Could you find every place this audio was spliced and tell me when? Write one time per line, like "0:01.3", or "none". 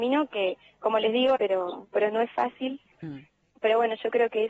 0:01.4
0:02.9

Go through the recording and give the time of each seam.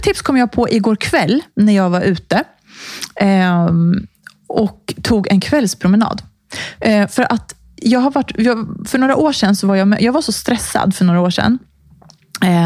0:06.8

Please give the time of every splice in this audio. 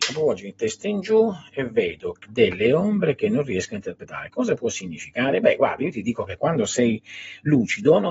none

